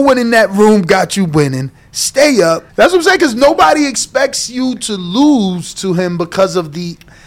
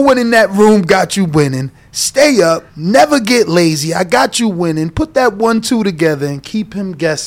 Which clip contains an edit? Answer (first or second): first